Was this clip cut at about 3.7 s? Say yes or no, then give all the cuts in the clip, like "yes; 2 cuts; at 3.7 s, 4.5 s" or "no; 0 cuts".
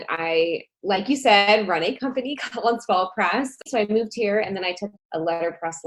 yes; 2 cuts; at 3.7 s, 5.0 s